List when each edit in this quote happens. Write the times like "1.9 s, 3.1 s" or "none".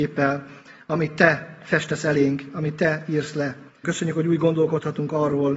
3.8 s